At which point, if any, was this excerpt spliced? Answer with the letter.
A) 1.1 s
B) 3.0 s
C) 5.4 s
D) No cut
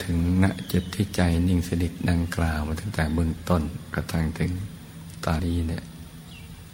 C